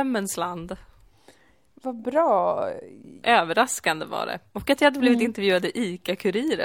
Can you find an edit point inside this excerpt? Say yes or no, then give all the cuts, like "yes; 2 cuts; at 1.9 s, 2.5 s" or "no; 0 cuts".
yes; 1 cut; at 3.2 s